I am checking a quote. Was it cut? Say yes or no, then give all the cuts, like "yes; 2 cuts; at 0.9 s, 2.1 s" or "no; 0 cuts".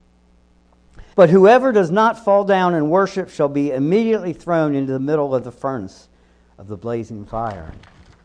yes; 1 cut; at 1.1 s